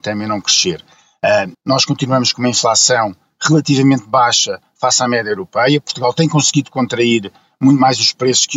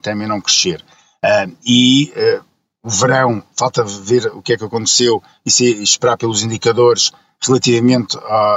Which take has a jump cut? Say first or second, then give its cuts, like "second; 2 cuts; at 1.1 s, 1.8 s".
first; 1 cut; at 1.5 s